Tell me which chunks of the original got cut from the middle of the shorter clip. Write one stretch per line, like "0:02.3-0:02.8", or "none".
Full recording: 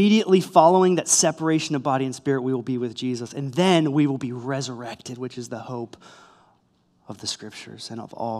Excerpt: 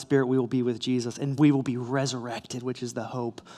0:03.5-0:03.9